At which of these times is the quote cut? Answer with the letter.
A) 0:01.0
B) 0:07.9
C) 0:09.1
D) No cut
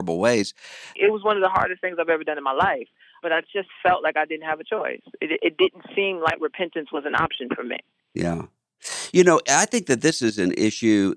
A